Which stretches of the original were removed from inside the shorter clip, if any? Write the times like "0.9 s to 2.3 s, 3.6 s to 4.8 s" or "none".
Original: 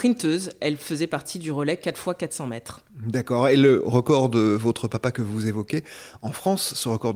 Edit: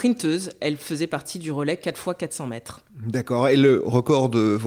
none